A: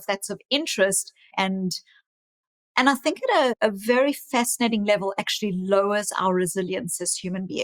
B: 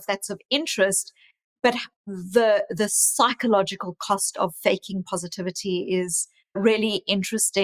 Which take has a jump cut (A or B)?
A